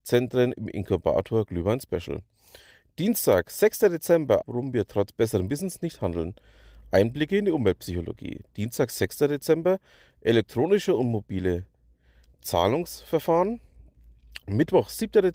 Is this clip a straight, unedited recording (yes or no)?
no